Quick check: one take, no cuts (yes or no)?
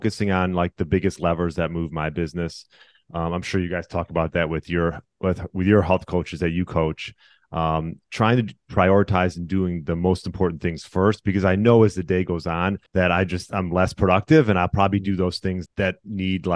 no